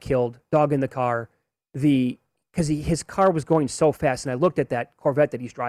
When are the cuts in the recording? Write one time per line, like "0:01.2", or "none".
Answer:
none